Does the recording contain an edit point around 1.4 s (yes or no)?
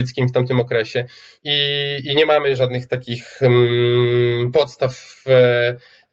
yes